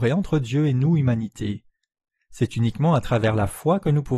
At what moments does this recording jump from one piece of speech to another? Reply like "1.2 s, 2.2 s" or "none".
none